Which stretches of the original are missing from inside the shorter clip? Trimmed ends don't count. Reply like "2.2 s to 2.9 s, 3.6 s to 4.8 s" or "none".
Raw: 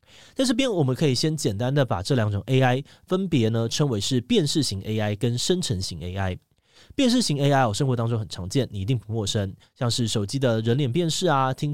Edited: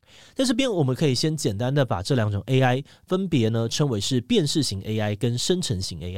none